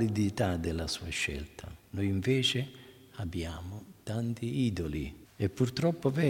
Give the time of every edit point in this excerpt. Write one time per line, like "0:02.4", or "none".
0:05.3